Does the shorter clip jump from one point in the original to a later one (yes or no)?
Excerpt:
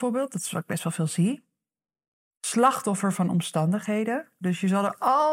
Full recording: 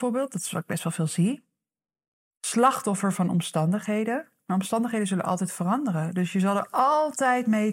yes